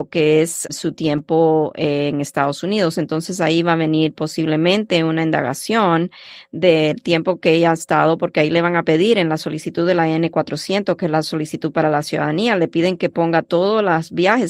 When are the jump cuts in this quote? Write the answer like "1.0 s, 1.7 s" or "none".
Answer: 2.9 s